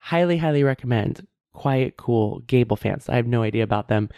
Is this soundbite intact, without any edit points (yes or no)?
no